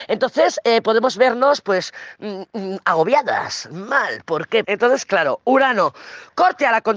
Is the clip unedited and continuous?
no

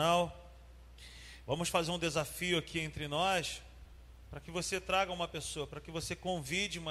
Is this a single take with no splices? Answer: no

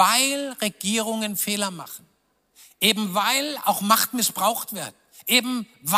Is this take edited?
no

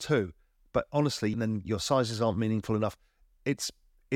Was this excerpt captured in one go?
no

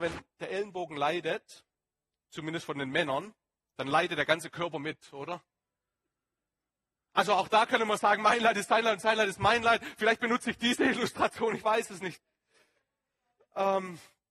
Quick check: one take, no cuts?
yes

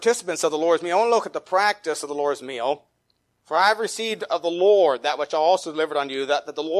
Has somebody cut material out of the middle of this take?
yes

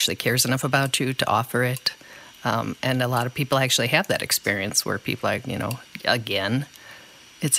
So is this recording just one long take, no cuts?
no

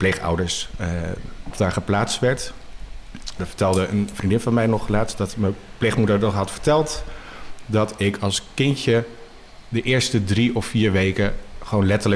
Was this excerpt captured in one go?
no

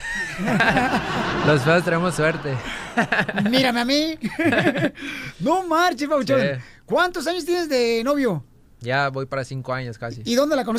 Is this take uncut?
yes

